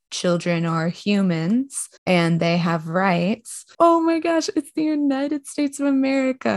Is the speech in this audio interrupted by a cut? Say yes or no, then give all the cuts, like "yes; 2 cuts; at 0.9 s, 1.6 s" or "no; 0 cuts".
yes; 2 cuts; at 2.0 s, 3.7 s